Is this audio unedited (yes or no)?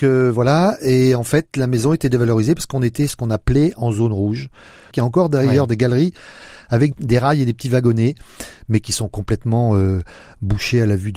no